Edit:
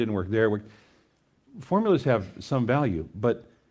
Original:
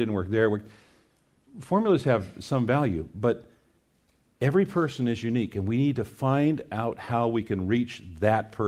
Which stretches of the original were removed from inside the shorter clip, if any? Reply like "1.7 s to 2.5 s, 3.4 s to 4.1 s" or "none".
none